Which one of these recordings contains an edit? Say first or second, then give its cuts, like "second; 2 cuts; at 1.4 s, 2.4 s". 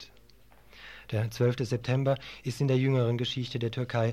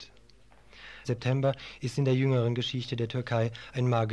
second; 1 cut; at 1.0 s